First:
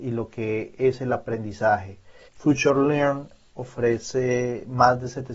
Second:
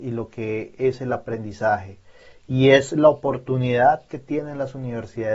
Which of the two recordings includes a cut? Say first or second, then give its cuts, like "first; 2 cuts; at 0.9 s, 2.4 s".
first; 1 cut; at 2.3 s